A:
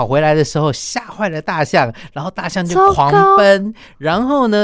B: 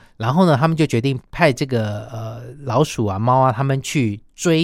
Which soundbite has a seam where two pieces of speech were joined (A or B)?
B